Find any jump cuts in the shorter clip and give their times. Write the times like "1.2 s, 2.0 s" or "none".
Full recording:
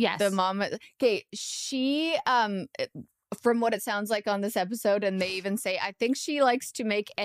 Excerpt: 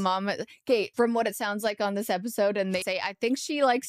0.9 s, 2.8 s